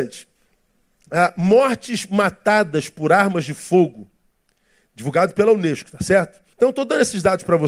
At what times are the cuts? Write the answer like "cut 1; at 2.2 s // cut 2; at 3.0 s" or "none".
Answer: cut 1; at 6.5 s

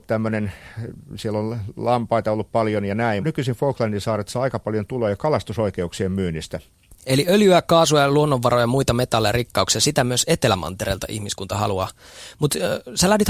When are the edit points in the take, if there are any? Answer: cut 1; at 3.2 s // cut 2; at 7.0 s

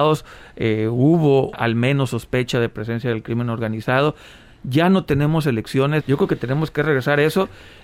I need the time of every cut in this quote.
cut 1; at 1.5 s // cut 2; at 6.0 s

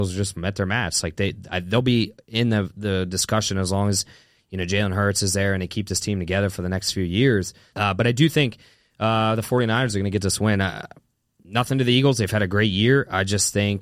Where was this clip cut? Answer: cut 1; at 7.7 s

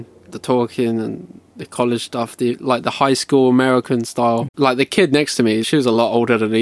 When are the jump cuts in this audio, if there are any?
cut 1; at 4.5 s // cut 2; at 5.6 s

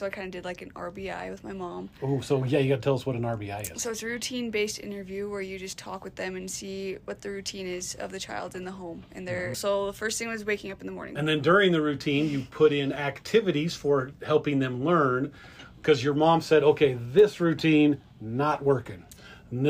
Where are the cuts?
cut 1; at 9.5 s // cut 2; at 11.1 s

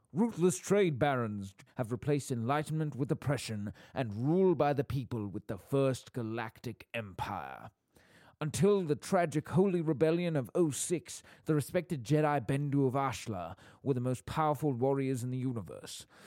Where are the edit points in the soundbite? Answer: cut 1; at 1.7 s

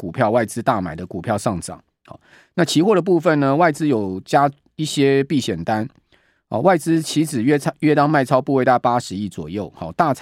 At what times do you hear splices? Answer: none

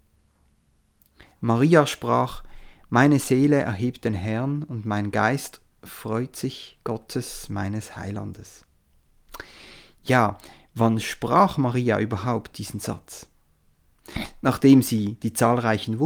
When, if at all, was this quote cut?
none

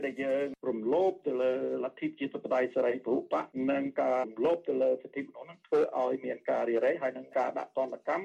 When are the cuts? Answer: cut 1; at 4.2 s

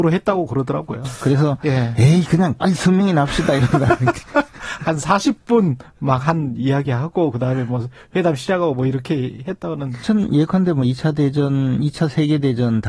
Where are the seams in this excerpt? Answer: cut 1; at 1.0 s // cut 2; at 10.0 s

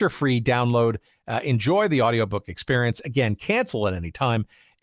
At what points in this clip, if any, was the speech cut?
none

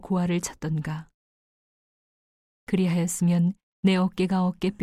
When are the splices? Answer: none

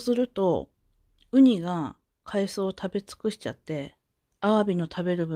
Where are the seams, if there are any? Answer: cut 1; at 4.3 s

